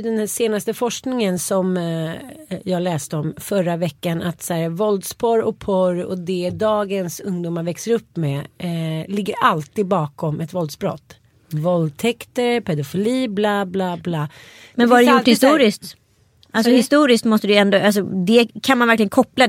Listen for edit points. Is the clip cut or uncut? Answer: uncut